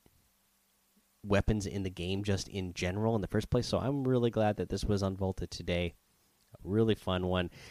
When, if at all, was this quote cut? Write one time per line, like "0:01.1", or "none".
none